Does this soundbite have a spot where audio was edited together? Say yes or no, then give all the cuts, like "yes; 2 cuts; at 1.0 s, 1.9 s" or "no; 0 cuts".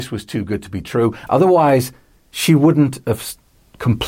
yes; 1 cut; at 1.3 s